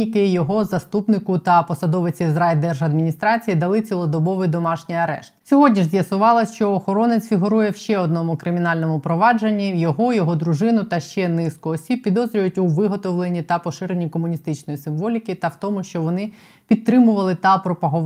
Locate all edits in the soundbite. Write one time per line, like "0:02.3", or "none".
0:05.4